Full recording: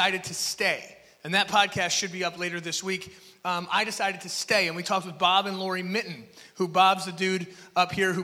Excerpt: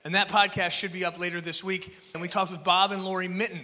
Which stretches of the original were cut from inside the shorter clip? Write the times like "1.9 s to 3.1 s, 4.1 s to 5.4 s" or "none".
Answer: 3.3 s to 4.7 s